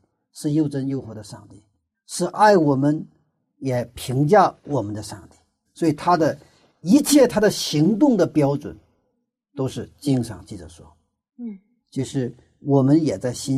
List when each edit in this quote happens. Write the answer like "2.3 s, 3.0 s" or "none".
5.6 s, 11.8 s